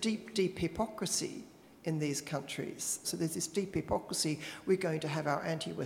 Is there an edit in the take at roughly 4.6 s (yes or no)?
no